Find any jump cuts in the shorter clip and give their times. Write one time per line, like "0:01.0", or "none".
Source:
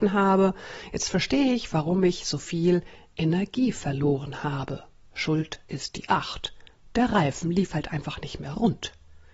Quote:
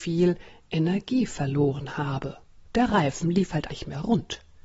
0:02.6
0:03.7